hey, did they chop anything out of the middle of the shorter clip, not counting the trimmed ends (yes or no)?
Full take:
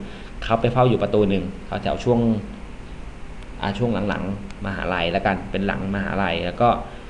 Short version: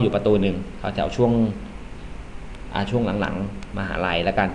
no